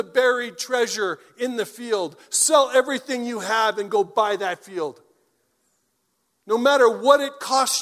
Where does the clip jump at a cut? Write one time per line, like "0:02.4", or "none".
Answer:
none